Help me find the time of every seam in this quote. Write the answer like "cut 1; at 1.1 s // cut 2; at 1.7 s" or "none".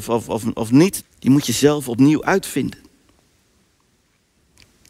cut 1; at 1.0 s